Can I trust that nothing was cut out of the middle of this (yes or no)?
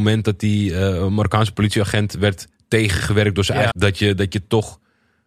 no